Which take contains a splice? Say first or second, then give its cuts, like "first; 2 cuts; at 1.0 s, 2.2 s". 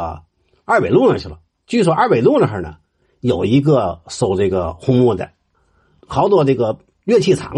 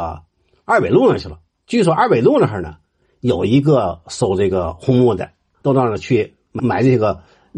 second; 1 cut; at 5.6 s